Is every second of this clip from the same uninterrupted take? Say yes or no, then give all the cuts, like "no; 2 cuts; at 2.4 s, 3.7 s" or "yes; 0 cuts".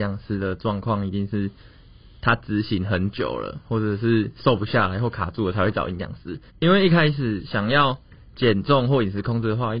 no; 1 cut; at 6.5 s